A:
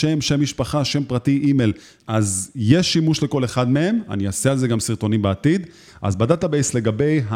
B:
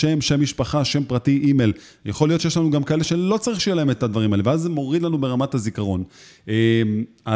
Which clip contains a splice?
A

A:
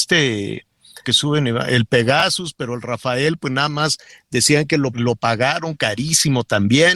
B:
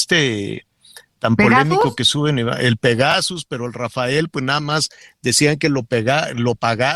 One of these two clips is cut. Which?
A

